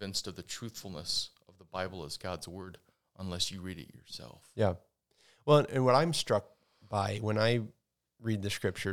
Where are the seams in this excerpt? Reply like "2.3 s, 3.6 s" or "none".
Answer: none